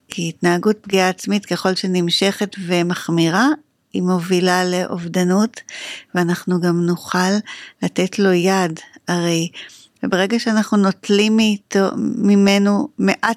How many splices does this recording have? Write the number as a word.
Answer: one